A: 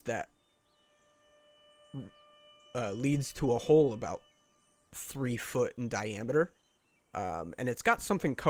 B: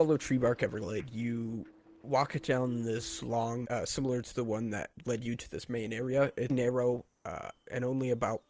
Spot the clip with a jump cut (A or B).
B